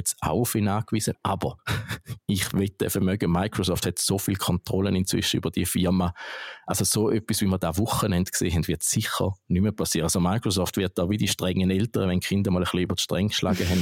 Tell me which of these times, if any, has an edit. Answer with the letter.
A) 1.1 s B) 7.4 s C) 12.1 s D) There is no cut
A